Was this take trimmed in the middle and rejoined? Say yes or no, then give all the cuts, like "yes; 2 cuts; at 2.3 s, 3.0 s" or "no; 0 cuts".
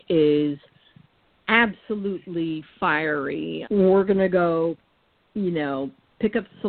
yes; 1 cut; at 3.6 s